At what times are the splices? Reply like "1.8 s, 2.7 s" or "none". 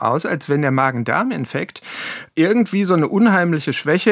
2.3 s